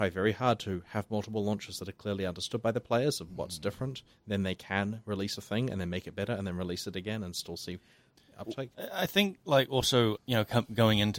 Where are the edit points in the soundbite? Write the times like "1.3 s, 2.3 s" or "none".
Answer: 10.2 s